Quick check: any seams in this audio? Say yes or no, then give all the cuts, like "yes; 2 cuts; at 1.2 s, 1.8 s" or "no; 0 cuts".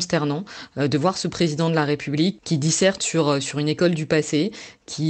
no; 0 cuts